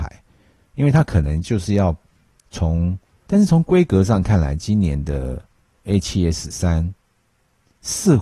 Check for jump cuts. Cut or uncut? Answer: cut